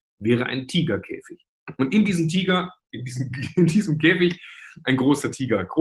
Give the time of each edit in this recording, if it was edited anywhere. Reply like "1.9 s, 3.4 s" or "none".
none